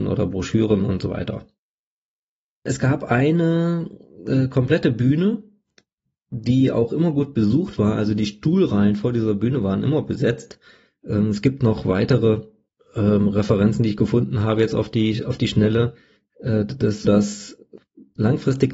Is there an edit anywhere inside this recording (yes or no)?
yes